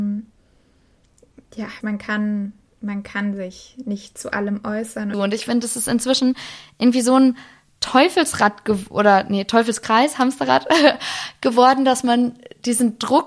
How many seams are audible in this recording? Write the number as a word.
two